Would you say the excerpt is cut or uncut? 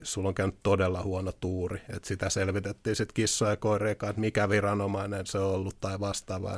uncut